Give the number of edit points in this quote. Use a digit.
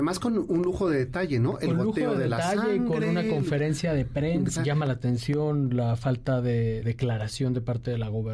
2